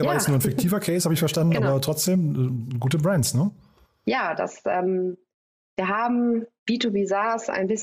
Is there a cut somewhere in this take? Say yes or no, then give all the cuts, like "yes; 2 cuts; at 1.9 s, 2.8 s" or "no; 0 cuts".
yes; 1 cut; at 6.6 s